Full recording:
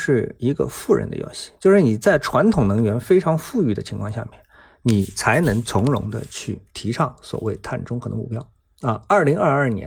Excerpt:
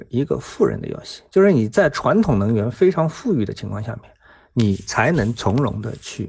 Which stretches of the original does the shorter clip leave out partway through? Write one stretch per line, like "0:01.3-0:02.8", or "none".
none